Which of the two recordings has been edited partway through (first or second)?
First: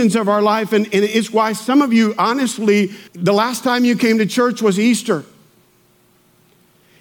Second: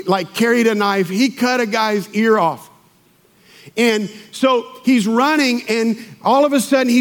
first